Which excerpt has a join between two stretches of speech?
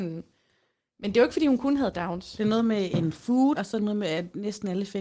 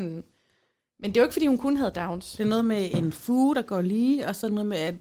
first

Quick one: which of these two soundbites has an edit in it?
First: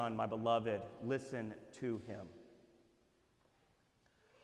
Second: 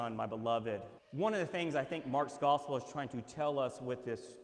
second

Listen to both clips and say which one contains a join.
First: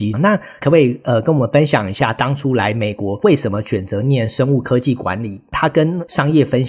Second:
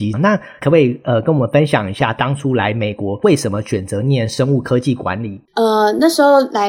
second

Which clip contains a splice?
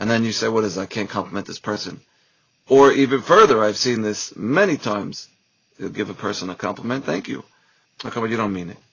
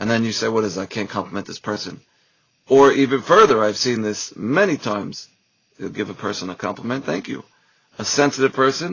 first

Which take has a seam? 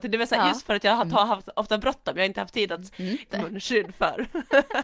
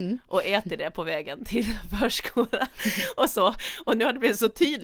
first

